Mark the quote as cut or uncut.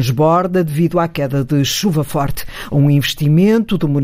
cut